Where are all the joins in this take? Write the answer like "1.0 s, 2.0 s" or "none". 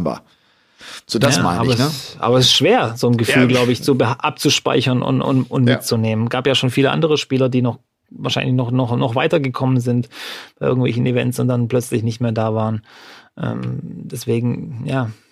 5.2 s